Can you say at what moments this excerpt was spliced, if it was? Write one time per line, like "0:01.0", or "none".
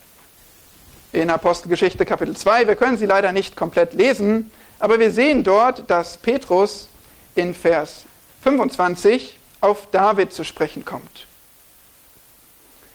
none